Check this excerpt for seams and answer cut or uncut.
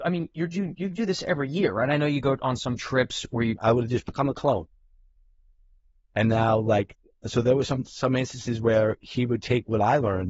cut